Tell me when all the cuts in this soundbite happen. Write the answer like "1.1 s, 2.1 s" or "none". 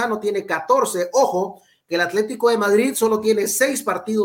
none